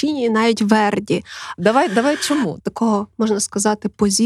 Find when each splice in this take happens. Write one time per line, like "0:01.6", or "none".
0:01.6
0:02.6